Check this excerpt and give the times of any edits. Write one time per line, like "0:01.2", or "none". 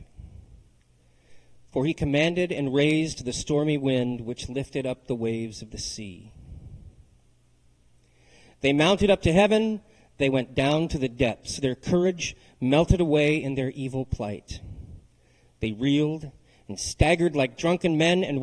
none